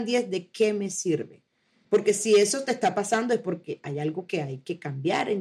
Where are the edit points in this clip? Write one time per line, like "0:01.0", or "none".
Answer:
0:01.8